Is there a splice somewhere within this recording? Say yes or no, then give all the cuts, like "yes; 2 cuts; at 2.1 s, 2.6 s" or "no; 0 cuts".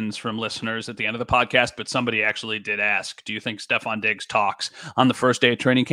no; 0 cuts